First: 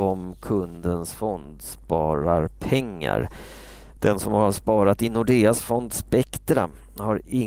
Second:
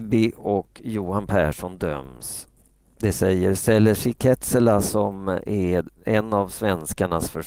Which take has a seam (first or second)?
first